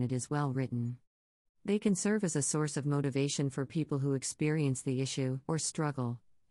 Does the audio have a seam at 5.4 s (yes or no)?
yes